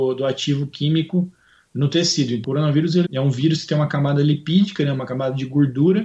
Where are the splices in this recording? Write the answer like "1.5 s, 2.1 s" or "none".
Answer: 3.0 s